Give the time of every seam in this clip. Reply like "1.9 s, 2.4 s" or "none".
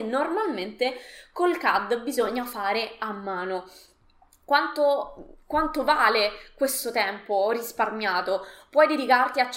none